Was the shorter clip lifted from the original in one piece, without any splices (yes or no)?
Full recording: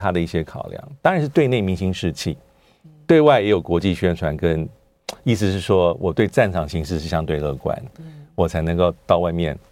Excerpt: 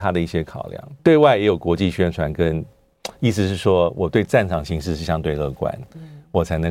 no